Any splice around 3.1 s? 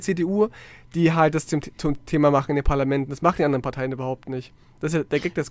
no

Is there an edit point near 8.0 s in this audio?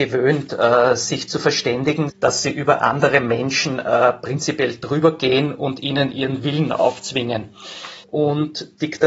yes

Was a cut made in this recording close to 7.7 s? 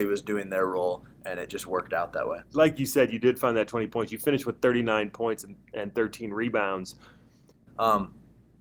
yes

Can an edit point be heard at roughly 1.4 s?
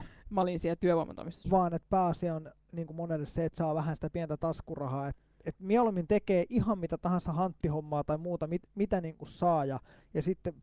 yes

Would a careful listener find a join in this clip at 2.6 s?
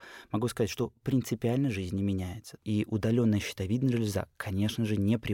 yes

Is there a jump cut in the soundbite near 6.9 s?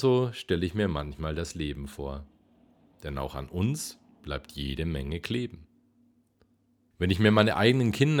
yes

